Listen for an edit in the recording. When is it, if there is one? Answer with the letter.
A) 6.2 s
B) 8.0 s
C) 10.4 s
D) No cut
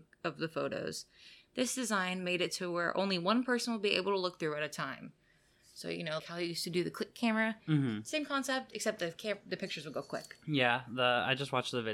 A